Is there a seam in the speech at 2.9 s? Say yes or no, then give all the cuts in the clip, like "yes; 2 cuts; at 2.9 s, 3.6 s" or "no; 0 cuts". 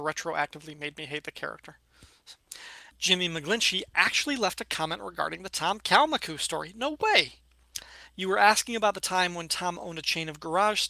yes; 1 cut; at 2.9 s